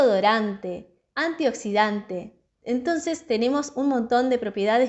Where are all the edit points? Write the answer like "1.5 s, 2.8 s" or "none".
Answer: none